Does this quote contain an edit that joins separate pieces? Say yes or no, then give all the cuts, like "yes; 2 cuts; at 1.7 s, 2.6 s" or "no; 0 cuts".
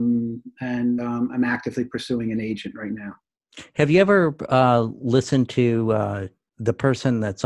yes; 1 cut; at 6.5 s